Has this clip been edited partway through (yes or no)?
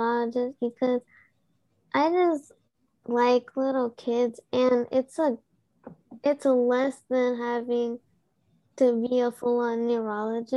no